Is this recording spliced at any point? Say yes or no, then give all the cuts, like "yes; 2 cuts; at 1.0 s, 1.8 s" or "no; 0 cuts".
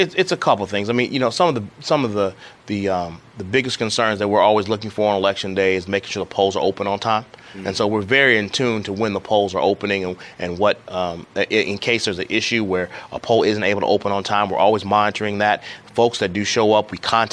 no; 0 cuts